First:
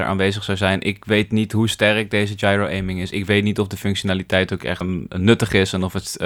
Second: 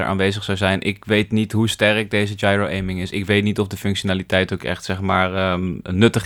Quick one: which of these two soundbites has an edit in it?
first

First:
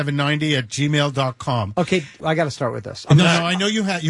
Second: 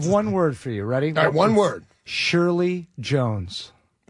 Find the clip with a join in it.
first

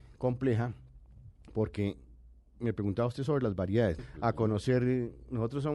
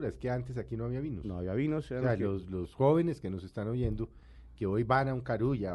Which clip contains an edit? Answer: first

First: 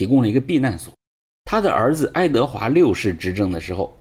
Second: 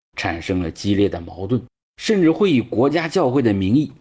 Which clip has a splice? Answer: first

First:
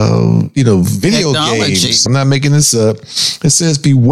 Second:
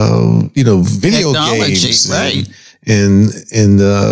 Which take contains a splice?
first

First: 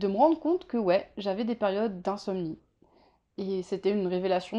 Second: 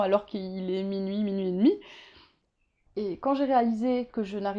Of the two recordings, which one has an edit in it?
second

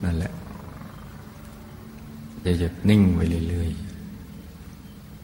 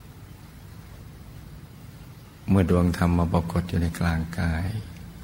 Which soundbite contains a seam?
first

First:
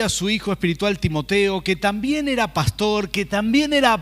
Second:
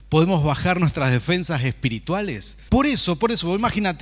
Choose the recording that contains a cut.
second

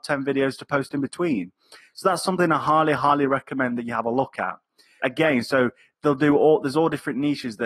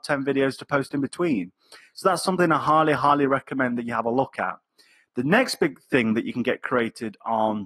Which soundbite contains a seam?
first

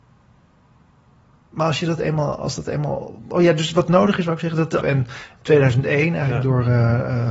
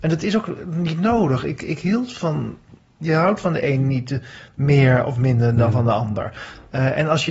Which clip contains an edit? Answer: first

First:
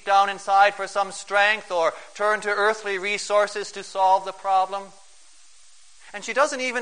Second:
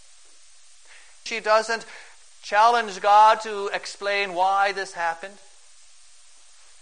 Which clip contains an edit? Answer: second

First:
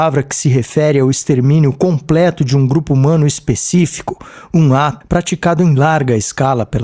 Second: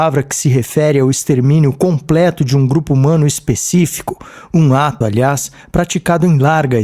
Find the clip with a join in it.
first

